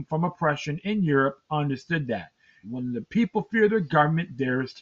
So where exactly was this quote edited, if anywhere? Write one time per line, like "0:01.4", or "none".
0:02.6